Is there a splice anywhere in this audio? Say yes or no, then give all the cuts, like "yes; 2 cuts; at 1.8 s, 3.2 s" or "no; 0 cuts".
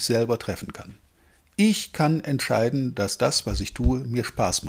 no; 0 cuts